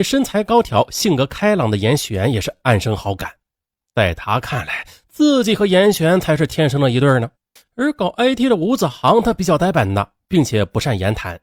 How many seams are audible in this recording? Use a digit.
1